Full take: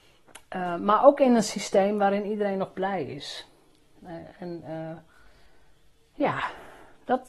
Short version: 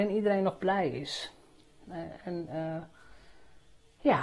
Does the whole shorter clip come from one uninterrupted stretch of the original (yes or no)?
yes